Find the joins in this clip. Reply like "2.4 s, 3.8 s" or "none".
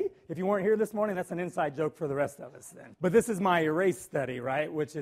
2.9 s